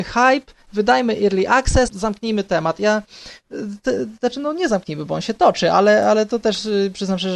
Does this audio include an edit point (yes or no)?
yes